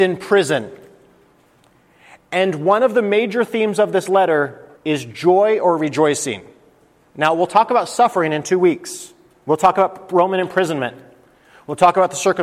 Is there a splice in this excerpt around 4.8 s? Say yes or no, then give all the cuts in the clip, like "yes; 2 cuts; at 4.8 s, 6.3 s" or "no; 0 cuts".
yes; 1 cut; at 4.8 s